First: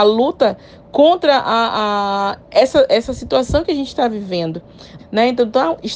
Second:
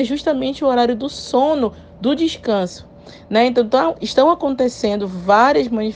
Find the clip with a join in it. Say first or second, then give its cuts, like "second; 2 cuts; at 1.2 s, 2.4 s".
first; 1 cut; at 5.0 s